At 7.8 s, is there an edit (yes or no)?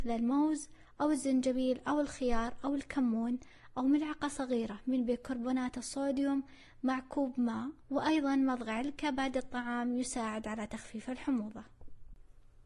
yes